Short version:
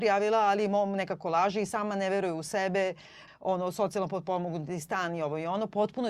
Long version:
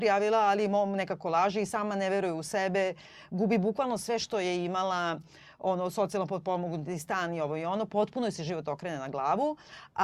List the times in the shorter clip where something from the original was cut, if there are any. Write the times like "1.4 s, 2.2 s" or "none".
3.3 s